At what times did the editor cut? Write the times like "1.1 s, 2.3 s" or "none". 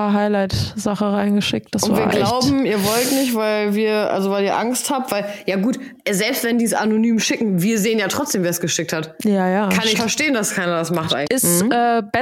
10.0 s, 11.2 s